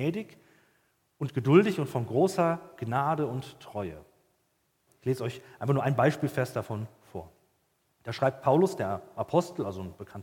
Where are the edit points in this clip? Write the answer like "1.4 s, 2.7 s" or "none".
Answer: 4.9 s